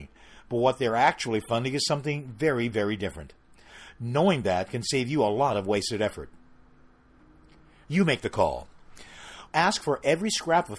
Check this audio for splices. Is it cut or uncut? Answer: cut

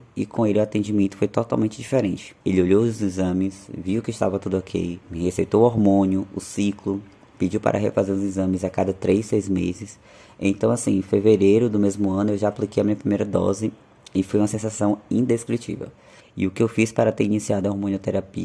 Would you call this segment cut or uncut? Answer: cut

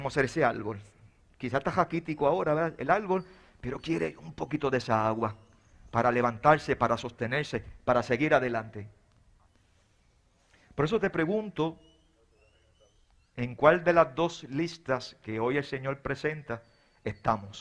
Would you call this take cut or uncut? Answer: uncut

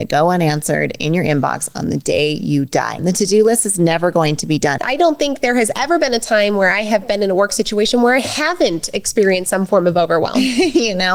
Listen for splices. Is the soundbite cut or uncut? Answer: cut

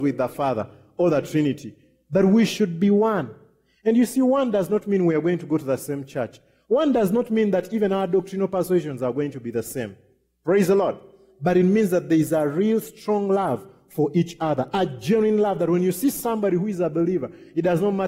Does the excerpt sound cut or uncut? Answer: uncut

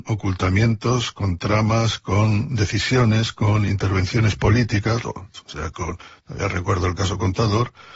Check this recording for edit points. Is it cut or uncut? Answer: cut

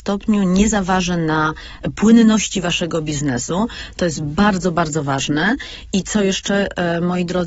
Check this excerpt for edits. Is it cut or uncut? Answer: uncut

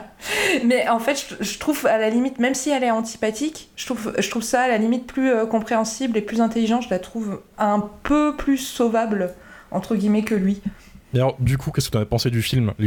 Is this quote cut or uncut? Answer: uncut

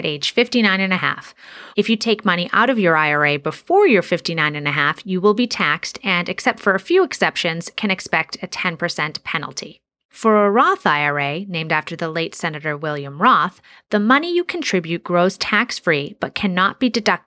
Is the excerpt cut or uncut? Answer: cut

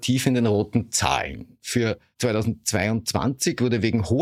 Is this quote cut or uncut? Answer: uncut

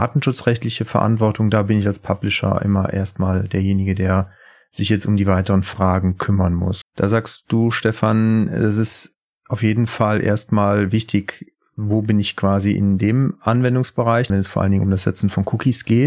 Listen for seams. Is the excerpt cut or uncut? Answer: cut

